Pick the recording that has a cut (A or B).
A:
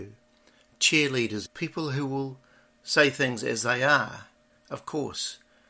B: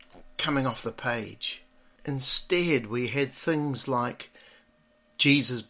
A